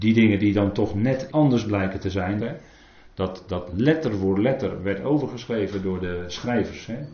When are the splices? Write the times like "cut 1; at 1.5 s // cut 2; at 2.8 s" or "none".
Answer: cut 1; at 1.3 s // cut 2; at 2.4 s